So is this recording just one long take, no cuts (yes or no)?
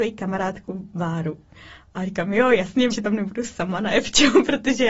no